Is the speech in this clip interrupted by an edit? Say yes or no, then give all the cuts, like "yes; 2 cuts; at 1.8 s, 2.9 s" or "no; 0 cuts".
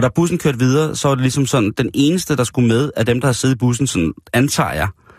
no; 0 cuts